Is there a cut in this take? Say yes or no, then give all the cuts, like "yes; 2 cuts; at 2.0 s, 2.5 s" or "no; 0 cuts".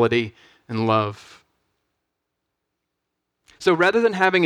no; 0 cuts